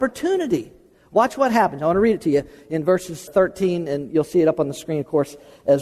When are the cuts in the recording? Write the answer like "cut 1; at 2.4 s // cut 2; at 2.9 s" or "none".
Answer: cut 1; at 3.3 s